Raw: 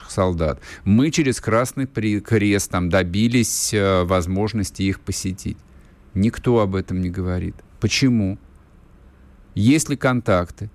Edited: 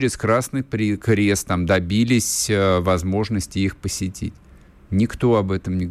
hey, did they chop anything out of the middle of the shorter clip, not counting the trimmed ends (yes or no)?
no